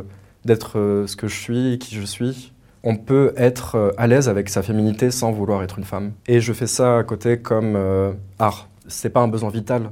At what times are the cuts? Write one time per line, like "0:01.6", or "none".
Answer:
0:06.2